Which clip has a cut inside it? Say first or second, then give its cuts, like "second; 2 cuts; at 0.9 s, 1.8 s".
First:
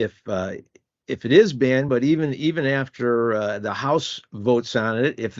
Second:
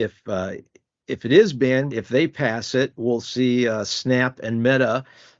second; 1 cut; at 1.9 s